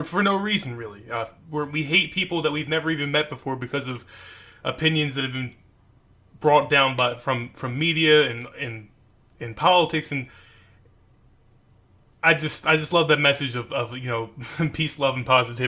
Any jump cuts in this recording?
no; 0 cuts

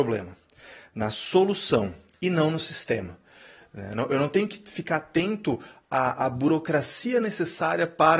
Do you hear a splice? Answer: no; 0 cuts

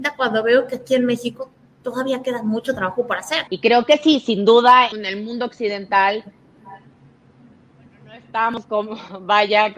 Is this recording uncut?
no; 2 cuts; at 3.5 s, 4.9 s

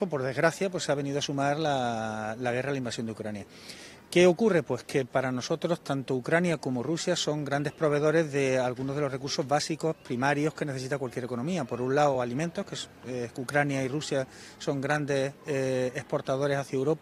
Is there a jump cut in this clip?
no; 0 cuts

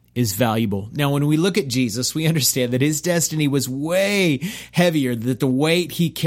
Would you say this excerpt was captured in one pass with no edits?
yes; 0 cuts

